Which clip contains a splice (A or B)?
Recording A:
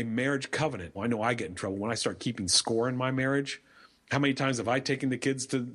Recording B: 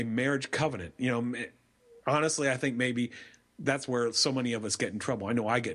A